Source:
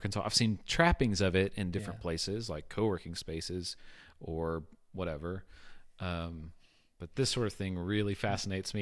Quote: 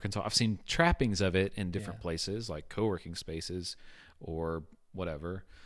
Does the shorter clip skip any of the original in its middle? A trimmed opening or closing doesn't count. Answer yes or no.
no